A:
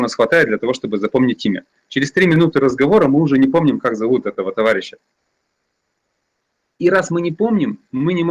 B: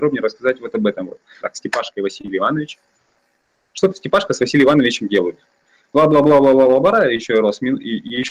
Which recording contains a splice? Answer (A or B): B